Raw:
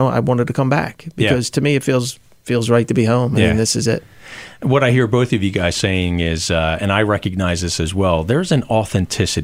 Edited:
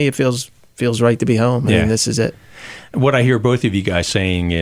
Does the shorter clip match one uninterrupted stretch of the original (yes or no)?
yes